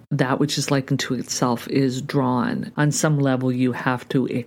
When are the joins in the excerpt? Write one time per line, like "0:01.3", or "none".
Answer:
0:02.7